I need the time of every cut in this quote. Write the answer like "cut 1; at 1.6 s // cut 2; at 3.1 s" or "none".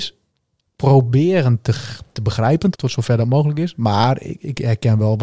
cut 1; at 2.7 s